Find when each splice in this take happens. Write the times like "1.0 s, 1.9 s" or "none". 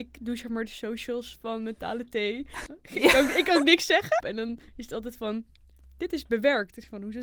2.7 s, 4.2 s